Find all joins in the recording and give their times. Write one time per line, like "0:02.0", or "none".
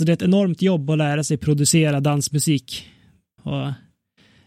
0:03.4